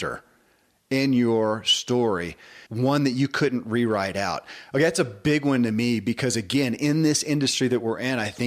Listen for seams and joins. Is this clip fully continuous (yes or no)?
no